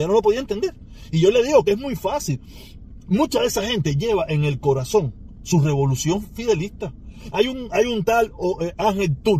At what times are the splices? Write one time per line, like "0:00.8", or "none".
0:07.3